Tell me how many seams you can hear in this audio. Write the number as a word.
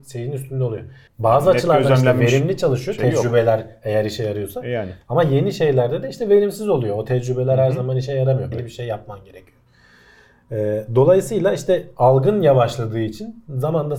two